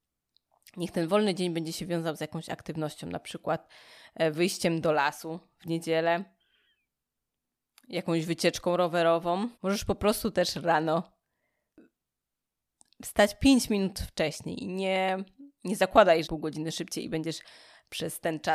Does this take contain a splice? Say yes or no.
yes